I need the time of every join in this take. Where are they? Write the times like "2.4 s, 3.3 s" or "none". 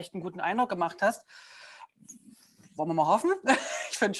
none